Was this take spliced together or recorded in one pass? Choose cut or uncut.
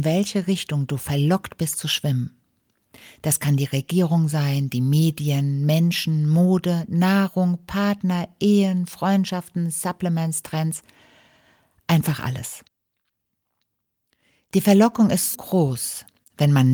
cut